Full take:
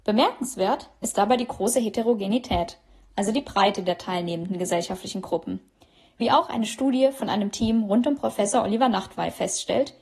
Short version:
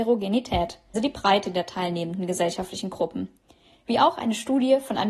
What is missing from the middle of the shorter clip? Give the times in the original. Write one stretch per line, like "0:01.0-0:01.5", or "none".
0:02.9-0:03.3